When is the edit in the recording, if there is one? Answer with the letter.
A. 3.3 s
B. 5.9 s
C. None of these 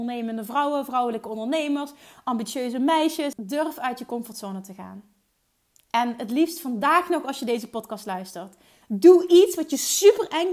A